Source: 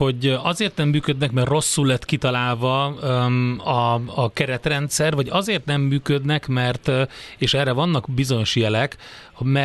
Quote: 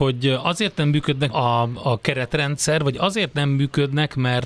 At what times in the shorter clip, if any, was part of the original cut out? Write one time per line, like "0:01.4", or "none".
0:01.3